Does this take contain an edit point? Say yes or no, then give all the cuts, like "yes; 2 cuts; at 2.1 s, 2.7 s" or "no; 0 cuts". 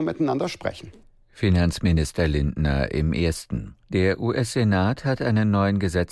yes; 1 cut; at 3.8 s